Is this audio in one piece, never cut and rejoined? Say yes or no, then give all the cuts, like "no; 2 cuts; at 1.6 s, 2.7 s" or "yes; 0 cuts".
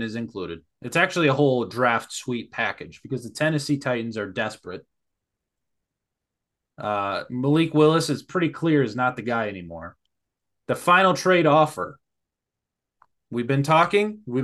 yes; 0 cuts